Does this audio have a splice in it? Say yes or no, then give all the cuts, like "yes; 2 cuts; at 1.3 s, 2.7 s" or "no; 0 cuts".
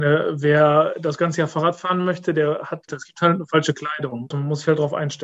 yes; 2 cuts; at 2.9 s, 4.3 s